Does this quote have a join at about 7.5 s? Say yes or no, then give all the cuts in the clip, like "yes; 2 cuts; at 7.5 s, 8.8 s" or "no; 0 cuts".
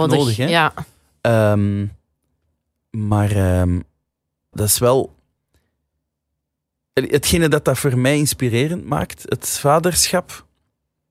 no; 1 cut; at 4.5 s